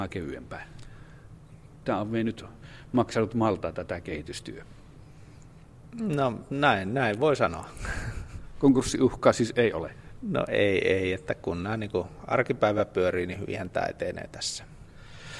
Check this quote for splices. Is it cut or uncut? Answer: cut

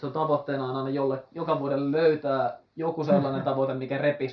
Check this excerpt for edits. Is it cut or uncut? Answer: uncut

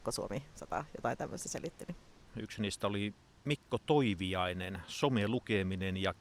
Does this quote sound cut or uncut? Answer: cut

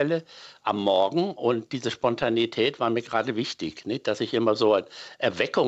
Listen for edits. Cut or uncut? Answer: uncut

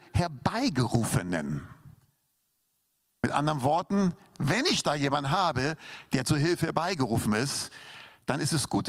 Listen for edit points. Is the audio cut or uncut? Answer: uncut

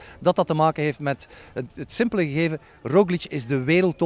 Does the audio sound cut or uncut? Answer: uncut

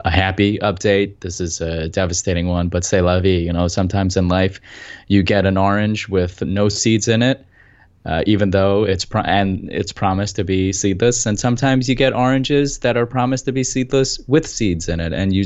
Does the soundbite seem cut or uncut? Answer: uncut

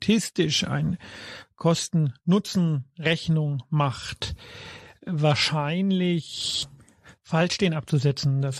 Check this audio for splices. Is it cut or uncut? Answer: uncut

